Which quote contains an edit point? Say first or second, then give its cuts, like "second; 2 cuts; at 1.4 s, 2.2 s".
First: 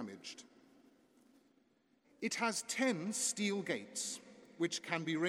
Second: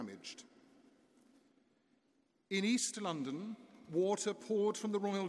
first; 1 cut; at 2.0 s